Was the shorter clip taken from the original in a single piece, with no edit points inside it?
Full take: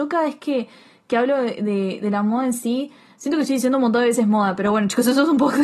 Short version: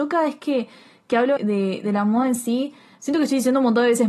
no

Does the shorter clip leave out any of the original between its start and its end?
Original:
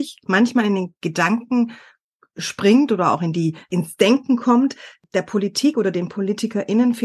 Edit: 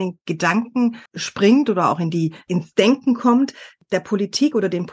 yes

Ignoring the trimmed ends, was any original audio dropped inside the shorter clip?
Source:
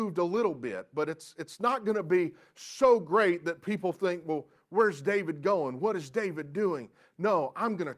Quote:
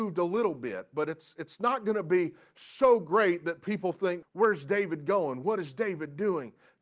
yes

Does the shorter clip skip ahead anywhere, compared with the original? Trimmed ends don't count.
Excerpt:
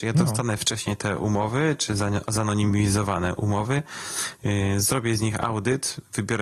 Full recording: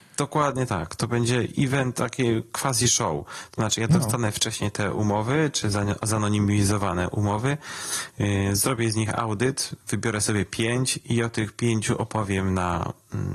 no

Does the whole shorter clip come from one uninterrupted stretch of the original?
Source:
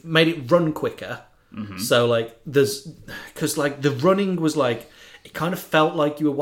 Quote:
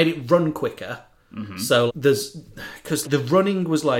no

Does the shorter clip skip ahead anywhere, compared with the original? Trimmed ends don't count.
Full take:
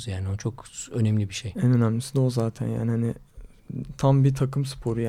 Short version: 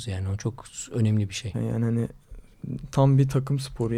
yes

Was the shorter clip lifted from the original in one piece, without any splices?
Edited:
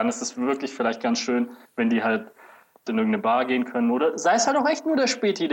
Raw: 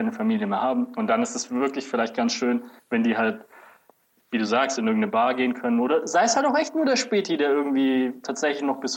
no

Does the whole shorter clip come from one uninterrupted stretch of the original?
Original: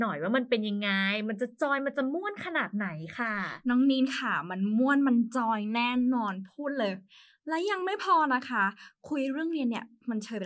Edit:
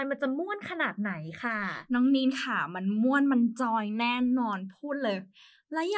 yes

